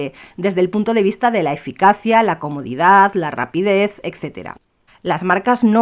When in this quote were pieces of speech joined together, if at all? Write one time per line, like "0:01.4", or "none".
0:04.9